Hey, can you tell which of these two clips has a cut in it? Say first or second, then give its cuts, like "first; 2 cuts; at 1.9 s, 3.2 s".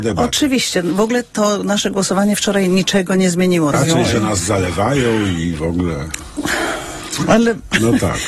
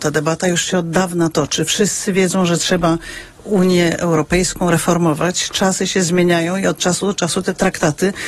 first; 1 cut; at 3.7 s